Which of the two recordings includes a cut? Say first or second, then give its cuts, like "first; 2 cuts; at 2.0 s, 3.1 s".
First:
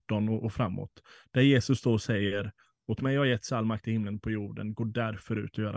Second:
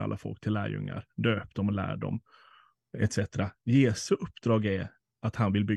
second; 1 cut; at 3.5 s